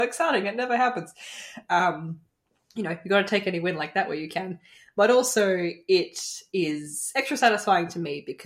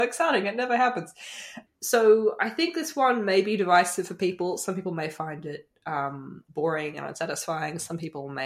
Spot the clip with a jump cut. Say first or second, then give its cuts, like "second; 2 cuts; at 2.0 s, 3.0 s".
second; 1 cut; at 1.7 s